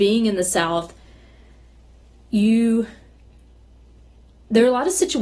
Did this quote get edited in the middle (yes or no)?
no